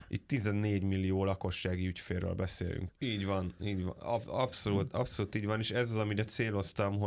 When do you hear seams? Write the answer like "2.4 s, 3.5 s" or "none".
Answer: 2.9 s